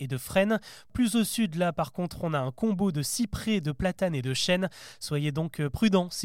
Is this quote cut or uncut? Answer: uncut